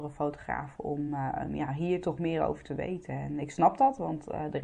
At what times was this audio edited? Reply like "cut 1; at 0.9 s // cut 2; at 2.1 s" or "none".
none